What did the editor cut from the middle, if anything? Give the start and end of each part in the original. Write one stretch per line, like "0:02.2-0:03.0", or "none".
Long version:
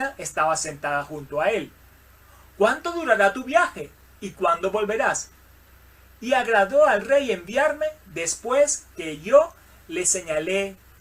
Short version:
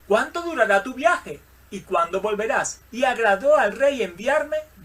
0:05.3-0:06.1